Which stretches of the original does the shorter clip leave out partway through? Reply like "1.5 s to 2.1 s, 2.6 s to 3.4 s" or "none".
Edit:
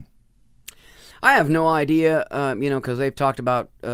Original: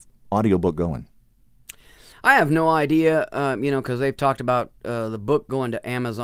none